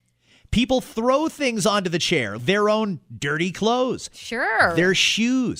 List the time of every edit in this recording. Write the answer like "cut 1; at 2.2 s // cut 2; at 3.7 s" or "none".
cut 1; at 2.4 s

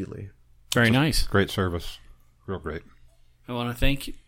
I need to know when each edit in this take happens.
none

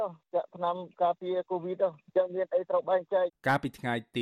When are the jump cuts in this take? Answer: cut 1; at 3.3 s

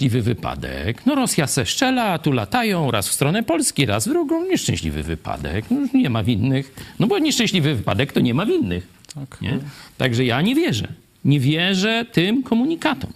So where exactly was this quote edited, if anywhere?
none

